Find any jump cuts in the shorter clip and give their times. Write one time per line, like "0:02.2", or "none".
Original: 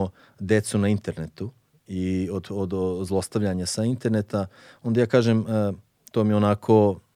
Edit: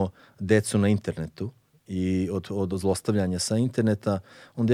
0:02.7